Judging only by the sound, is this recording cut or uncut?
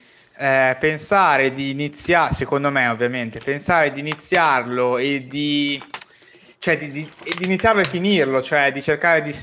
uncut